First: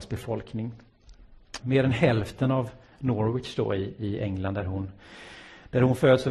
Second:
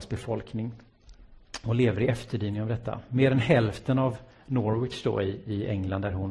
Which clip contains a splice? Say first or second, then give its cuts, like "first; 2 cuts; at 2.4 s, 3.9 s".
first; 1 cut; at 1.6 s